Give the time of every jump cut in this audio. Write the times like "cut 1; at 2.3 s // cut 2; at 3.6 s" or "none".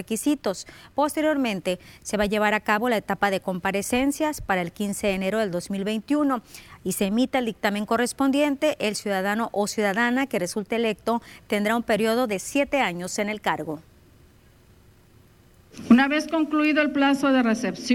none